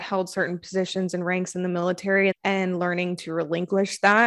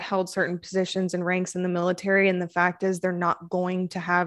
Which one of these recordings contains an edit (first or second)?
first